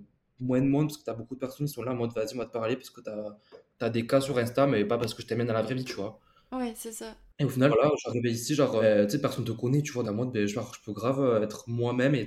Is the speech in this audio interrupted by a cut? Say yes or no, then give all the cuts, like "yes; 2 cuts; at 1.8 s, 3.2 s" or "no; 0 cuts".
yes; 2 cuts; at 7.7 s, 10.0 s